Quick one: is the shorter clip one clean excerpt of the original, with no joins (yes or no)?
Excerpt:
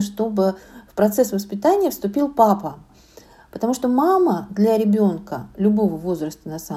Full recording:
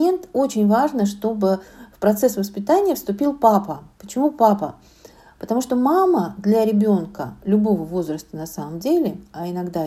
no